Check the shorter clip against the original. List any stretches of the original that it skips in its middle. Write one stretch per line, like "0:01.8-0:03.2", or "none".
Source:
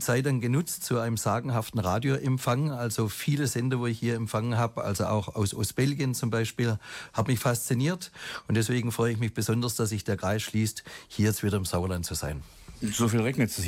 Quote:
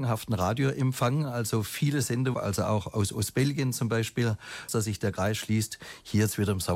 0:03.8-0:04.8
0:07.1-0:09.7